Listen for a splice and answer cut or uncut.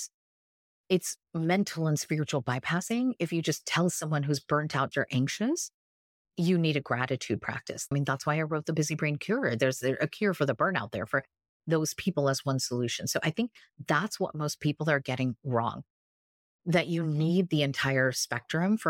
cut